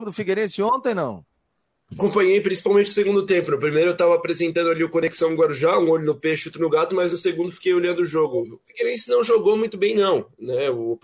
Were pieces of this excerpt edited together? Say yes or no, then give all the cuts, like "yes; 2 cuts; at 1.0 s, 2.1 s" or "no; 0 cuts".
no; 0 cuts